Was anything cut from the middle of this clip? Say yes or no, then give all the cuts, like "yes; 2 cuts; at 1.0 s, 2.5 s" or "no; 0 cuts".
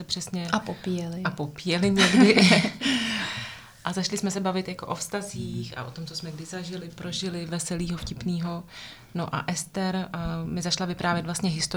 no; 0 cuts